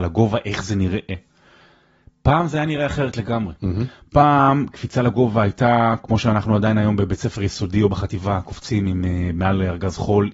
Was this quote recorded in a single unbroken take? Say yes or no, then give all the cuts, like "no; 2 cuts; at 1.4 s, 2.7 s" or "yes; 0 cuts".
yes; 0 cuts